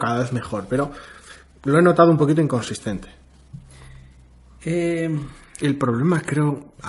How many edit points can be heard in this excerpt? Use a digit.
0